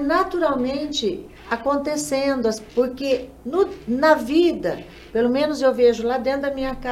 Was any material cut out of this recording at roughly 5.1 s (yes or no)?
no